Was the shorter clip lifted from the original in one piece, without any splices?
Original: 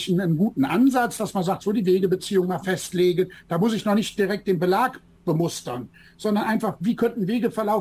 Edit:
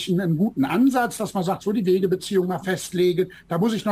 yes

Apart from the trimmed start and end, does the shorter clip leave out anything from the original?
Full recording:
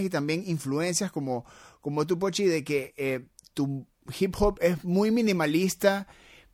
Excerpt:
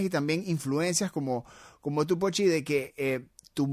no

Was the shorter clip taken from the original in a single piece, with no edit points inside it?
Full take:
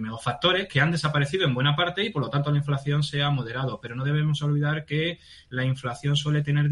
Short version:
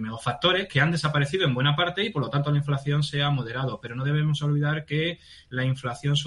yes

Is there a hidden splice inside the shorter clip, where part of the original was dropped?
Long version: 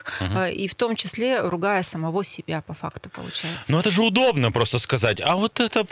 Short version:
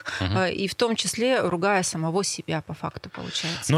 no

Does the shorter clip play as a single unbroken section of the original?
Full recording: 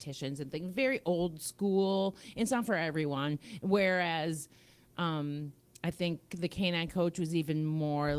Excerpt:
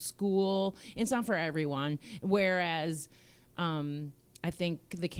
yes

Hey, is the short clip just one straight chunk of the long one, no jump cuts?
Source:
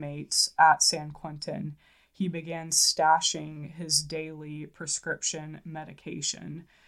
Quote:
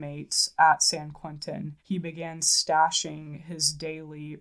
no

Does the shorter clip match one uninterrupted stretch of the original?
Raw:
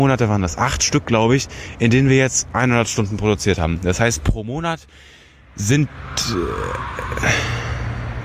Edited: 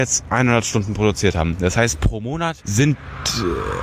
no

